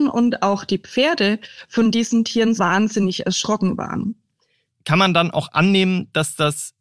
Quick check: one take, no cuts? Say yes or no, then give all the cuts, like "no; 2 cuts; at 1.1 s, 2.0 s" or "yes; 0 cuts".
no; 2 cuts; at 2.6 s, 4.7 s